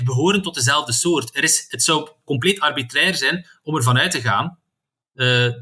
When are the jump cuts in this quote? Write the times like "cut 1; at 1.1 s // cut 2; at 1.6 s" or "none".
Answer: none